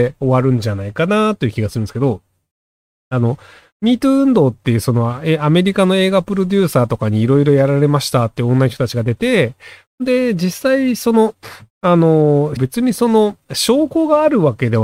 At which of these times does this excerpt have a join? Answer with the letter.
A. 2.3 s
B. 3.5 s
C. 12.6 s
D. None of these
C